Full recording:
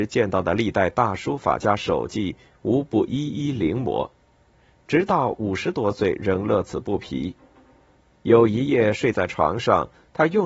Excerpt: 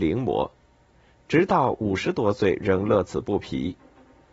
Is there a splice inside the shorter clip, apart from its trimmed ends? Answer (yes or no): no